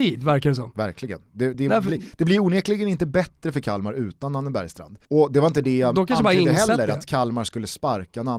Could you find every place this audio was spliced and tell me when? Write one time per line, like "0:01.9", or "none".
0:01.5
0:05.1